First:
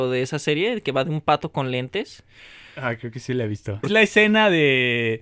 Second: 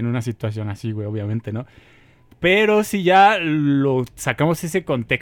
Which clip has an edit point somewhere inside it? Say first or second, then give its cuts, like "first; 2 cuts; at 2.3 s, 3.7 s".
first; 1 cut; at 3.8 s